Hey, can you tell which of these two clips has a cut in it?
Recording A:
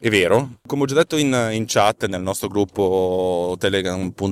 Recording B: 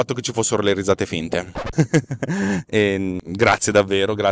B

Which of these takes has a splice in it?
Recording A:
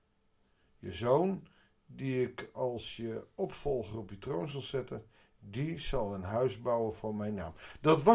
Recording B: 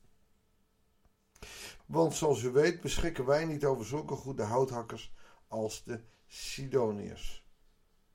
B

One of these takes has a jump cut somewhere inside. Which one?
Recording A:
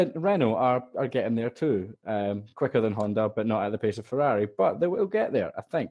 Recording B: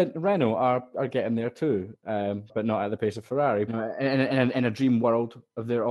B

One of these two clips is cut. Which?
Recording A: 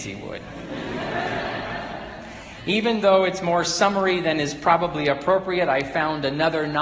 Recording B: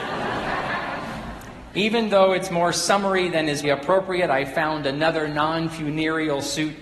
B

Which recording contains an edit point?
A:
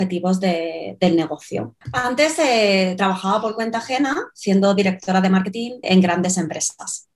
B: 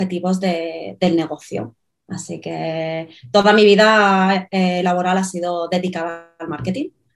A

